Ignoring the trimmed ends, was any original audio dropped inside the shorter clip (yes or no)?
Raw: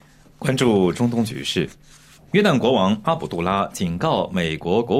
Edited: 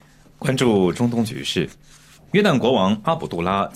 no